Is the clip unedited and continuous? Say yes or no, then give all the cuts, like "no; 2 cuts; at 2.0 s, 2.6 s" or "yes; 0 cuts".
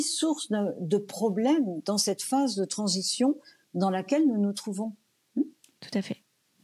yes; 0 cuts